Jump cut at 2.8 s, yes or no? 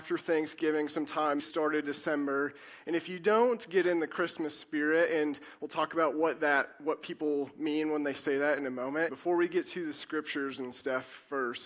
no